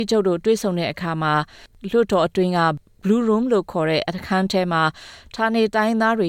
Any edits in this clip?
no; 0 cuts

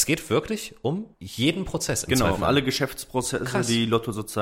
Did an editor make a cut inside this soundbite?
yes; 1 cut; at 2.4 s

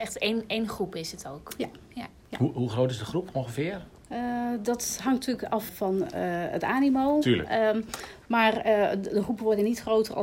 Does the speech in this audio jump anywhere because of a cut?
yes; 1 cut; at 5.7 s

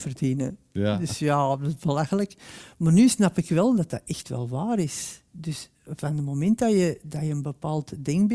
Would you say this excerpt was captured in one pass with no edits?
yes; 0 cuts

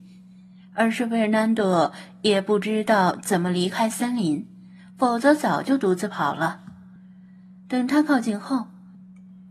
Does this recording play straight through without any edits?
yes; 0 cuts

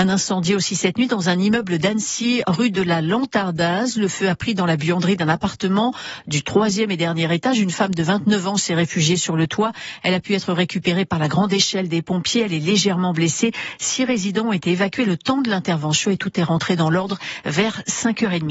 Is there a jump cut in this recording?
no; 0 cuts

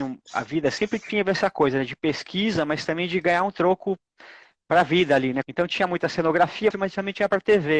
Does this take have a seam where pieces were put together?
yes; 2 cuts; at 5.4 s, 6.7 s

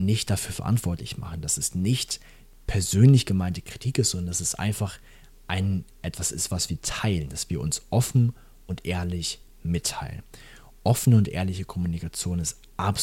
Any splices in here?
no; 0 cuts

